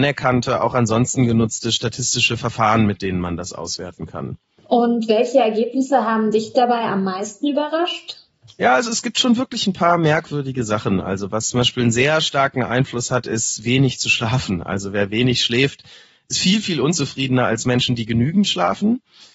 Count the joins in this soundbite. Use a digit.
0